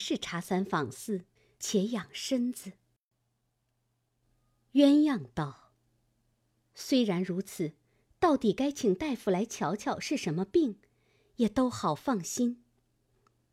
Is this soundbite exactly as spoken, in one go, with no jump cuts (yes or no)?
no